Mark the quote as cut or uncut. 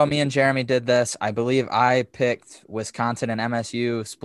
uncut